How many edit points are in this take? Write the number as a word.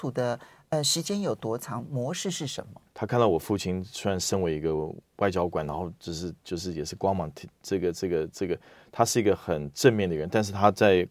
two